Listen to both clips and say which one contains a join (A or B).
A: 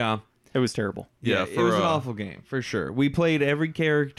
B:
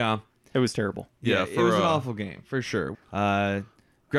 B